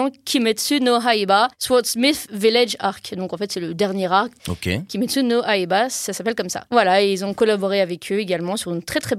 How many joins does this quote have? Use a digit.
2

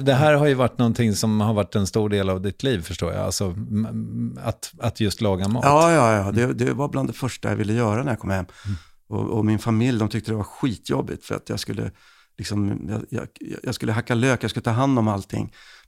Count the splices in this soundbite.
0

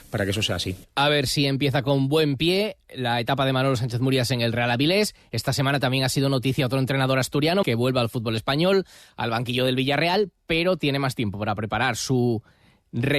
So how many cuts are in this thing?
1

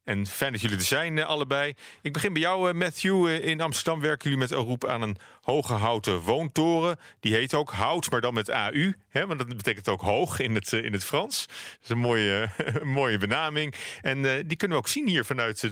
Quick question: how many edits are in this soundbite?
0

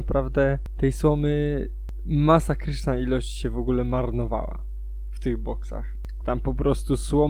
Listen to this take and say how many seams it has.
1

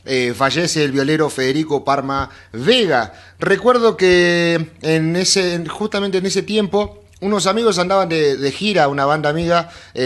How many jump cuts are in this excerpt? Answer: 0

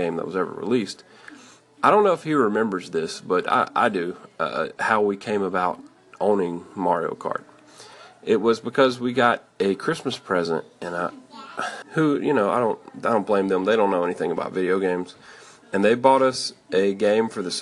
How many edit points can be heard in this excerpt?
1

